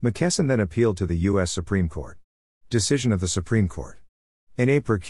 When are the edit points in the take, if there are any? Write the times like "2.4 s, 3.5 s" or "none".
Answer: none